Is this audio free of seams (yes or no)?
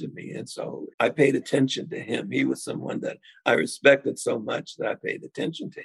no